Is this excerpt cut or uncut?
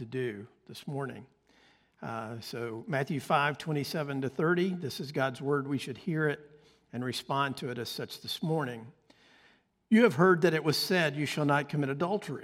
uncut